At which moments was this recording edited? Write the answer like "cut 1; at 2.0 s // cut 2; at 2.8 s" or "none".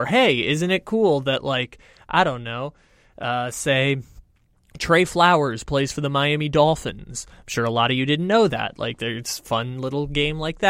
none